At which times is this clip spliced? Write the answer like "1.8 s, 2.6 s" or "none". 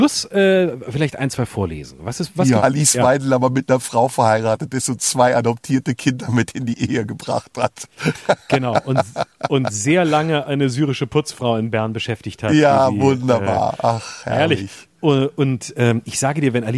2.6 s